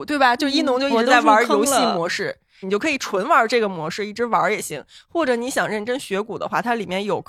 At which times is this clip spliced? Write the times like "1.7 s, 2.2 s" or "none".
2.6 s

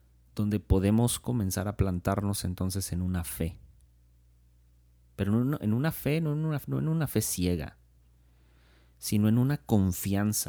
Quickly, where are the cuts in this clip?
none

